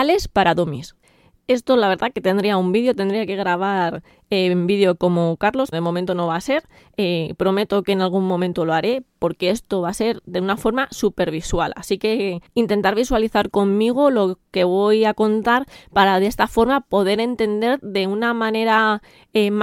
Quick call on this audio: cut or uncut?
cut